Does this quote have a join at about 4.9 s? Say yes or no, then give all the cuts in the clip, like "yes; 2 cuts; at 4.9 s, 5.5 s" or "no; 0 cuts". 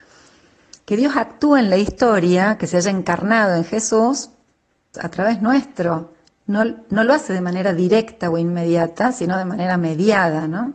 yes; 1 cut; at 4.9 s